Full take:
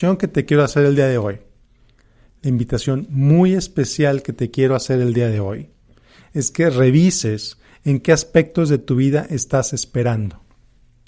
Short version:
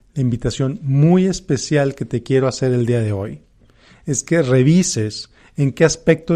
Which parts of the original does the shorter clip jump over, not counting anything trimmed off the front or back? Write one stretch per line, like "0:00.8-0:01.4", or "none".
none